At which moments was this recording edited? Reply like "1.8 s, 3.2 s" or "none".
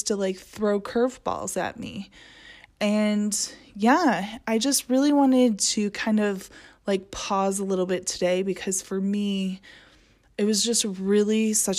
none